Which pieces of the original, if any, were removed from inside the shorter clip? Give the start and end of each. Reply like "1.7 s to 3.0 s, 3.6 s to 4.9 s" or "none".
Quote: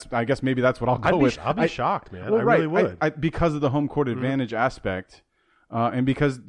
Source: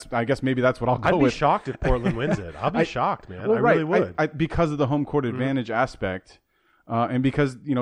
1.4 s to 2.5 s